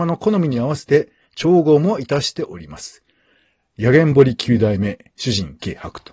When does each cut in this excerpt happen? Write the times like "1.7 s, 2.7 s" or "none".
none